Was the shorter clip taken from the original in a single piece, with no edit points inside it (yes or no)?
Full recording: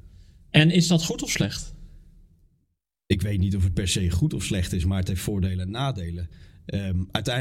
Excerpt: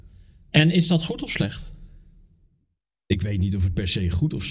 yes